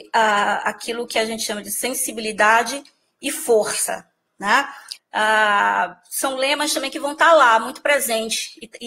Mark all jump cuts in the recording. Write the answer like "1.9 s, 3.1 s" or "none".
5.0 s